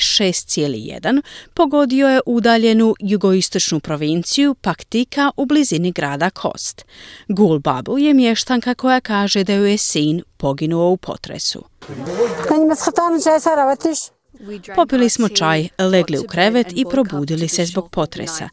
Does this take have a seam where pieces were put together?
no; 0 cuts

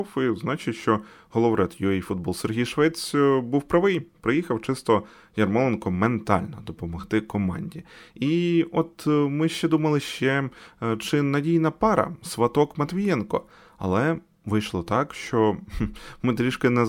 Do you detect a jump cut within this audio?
no; 0 cuts

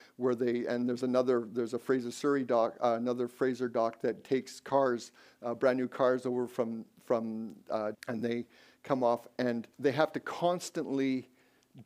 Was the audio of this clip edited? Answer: yes; 2 cuts; at 7.9 s, 9.7 s

